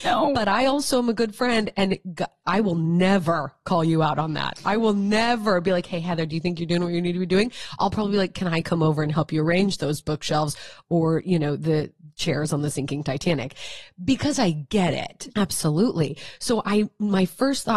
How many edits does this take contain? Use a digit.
1